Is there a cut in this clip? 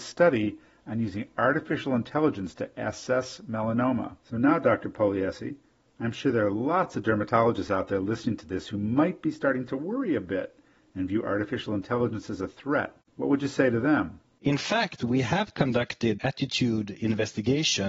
no; 0 cuts

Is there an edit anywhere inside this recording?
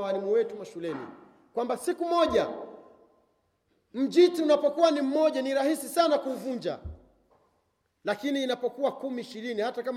no; 0 cuts

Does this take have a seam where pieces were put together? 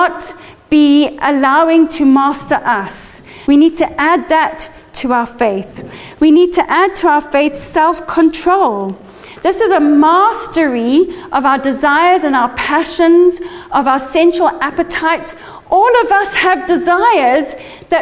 yes; 1 cut; at 3.4 s

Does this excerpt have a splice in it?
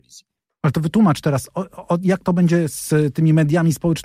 no; 0 cuts

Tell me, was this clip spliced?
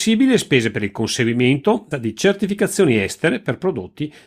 yes; 1 cut; at 1.9 s

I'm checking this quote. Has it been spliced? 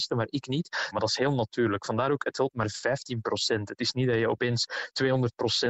yes; 1 cut; at 0.9 s

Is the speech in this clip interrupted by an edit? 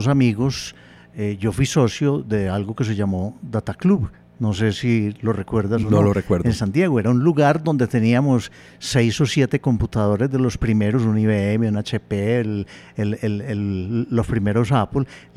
no; 0 cuts

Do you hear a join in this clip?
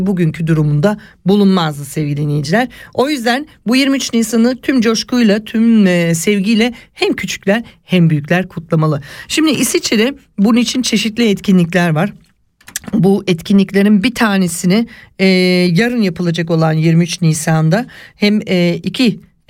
no; 0 cuts

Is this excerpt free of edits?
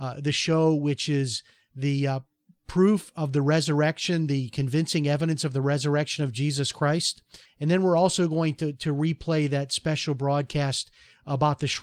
no; 1 cut; at 7.5 s

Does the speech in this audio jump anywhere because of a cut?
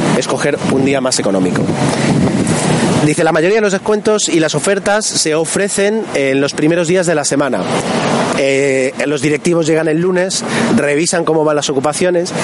yes; 2 cuts; at 3.0 s, 8.3 s

